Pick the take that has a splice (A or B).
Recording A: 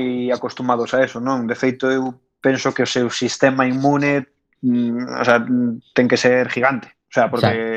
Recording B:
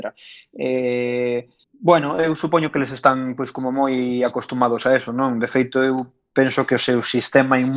B